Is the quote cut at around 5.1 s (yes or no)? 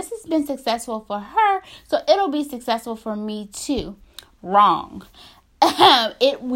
no